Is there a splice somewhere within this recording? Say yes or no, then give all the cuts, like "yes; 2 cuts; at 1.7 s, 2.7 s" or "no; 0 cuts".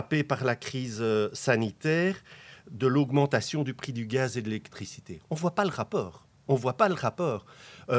no; 0 cuts